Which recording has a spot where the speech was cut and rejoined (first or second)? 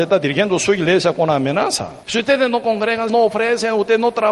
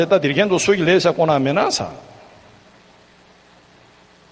first